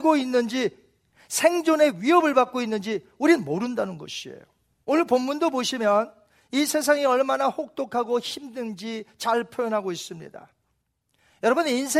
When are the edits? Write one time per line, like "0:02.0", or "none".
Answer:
0:04.8

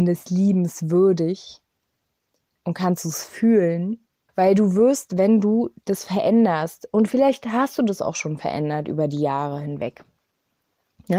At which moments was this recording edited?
0:04.3

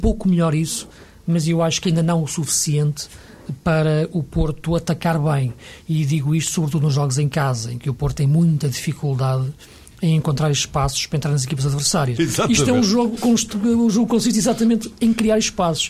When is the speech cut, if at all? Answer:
0:12.2
0:13.2

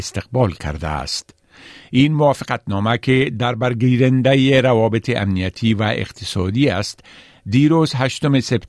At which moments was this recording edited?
none

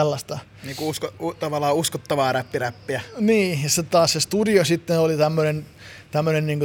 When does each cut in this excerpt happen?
none

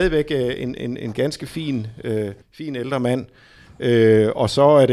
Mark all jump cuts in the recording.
0:02.4

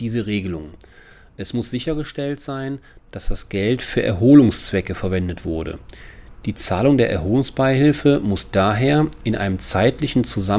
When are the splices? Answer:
none

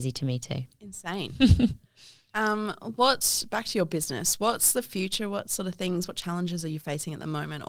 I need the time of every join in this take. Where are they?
none

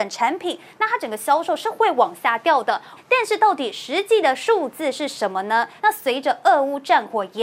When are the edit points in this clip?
0:03.0
0:05.8

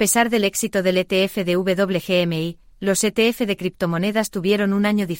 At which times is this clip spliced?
none

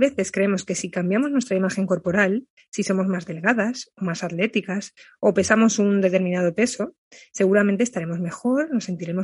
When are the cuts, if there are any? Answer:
none

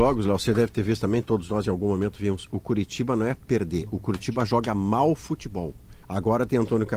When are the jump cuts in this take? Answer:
0:06.0

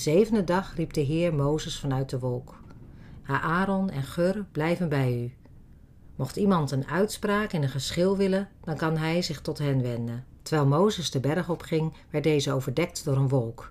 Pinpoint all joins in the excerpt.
0:03.2

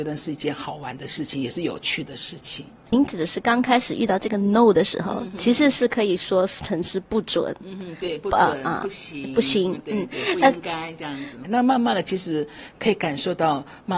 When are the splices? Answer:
0:11.4

